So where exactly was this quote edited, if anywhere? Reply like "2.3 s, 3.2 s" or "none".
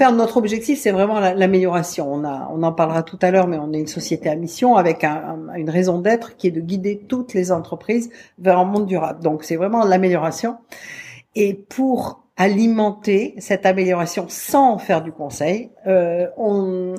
none